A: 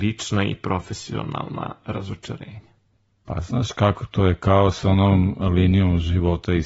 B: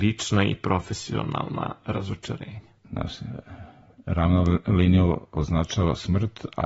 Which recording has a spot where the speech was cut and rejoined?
B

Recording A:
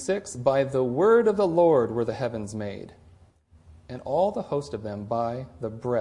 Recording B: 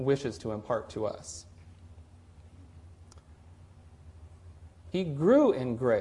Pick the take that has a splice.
B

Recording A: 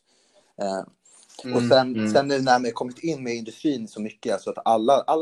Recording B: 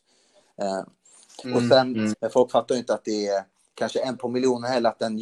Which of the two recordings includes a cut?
B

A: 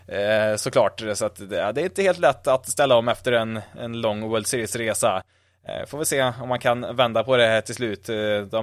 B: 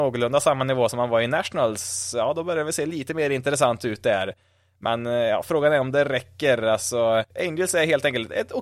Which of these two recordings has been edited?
B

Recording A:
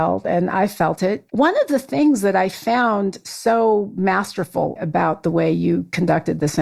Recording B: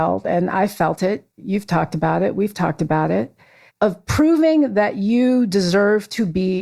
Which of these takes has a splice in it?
A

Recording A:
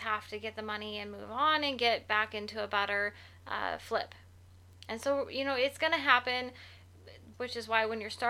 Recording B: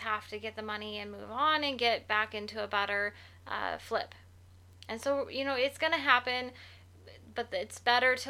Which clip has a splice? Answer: A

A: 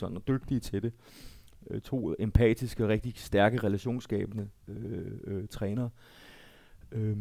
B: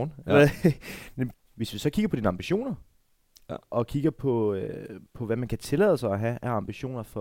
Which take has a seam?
B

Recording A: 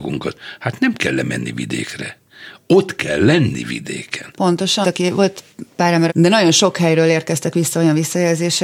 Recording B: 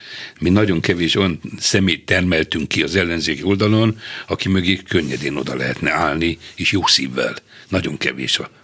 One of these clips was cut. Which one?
A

